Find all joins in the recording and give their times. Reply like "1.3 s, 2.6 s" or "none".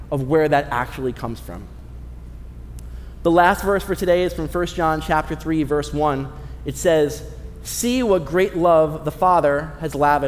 none